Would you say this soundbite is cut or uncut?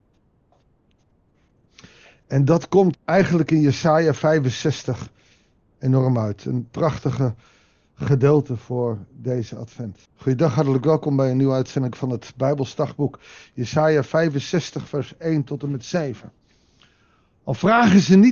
cut